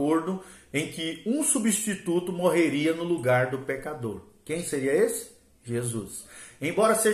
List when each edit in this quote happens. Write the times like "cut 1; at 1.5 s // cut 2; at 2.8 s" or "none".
none